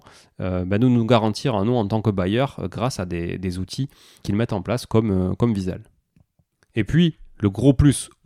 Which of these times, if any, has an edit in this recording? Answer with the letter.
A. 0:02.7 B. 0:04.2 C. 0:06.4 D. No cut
B